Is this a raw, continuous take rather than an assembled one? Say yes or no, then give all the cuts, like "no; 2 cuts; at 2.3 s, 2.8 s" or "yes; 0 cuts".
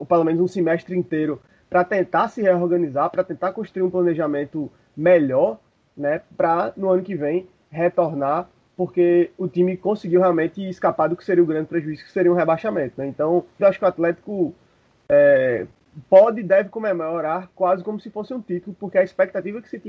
no; 1 cut; at 13.6 s